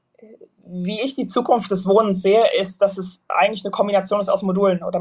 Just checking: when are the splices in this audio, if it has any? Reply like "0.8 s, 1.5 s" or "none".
none